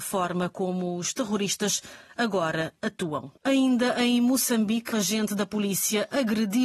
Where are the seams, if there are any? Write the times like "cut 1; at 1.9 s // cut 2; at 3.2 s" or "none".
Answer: cut 1; at 3.4 s // cut 2; at 4.9 s